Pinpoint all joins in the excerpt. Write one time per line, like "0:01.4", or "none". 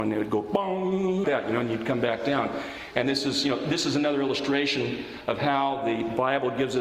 0:01.2